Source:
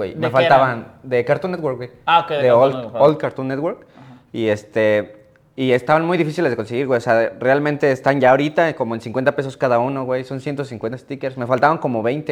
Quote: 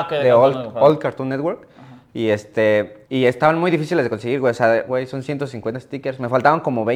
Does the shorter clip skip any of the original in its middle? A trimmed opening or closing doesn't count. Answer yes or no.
yes